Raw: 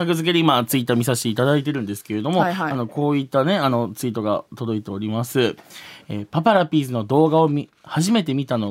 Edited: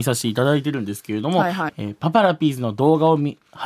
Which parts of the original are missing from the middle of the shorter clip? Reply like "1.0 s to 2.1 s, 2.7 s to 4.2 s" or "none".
2.7 s to 6.0 s